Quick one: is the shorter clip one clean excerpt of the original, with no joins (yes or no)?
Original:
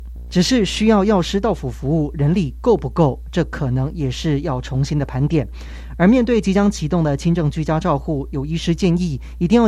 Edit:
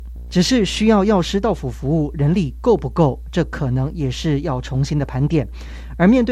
yes